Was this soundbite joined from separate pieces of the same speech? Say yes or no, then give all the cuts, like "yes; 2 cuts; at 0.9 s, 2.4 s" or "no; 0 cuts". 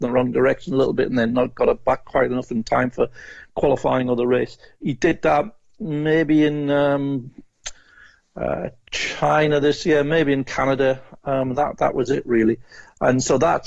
no; 0 cuts